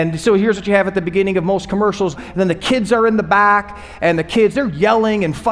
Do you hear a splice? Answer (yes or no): yes